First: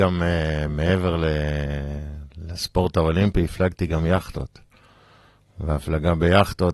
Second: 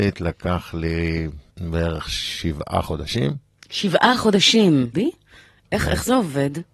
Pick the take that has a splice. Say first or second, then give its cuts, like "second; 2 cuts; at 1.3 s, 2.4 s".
second; 2 cuts; at 1.5 s, 4.9 s